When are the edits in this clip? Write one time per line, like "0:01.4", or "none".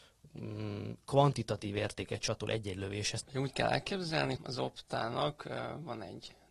0:03.2
0:04.4